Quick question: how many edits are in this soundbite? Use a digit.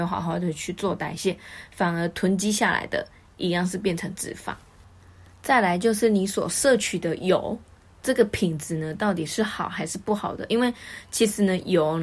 0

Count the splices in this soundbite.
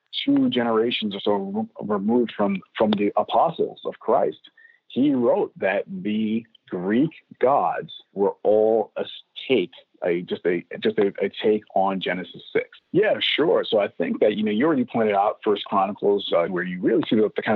3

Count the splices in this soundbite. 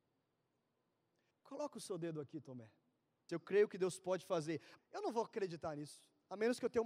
3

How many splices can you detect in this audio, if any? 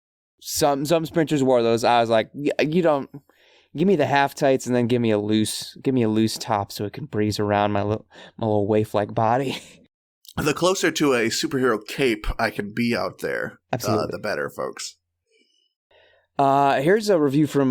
0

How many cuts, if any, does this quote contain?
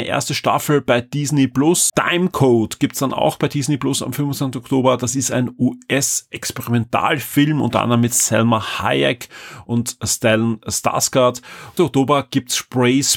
2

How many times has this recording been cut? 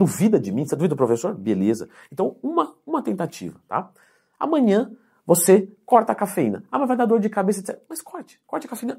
0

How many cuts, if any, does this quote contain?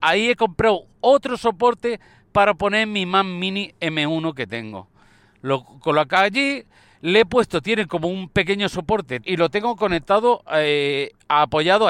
1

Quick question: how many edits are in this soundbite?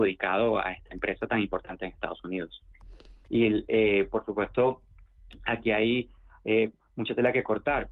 1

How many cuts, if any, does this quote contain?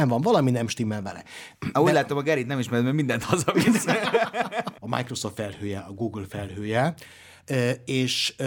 1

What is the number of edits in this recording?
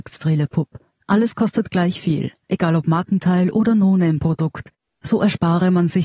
0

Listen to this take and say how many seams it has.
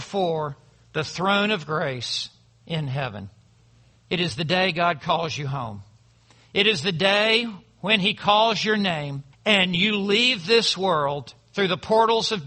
2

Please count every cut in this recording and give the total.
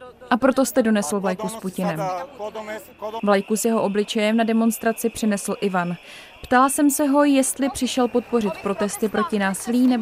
1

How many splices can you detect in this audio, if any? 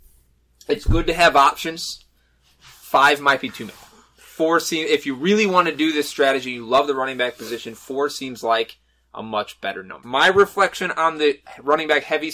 1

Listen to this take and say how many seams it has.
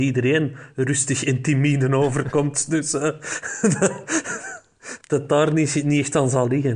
1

